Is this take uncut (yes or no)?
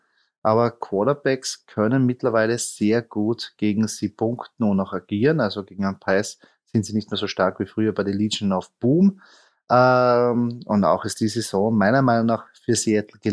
yes